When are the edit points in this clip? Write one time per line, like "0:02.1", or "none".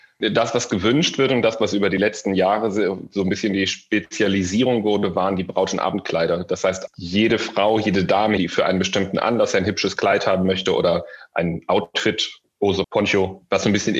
0:08.4
0:12.8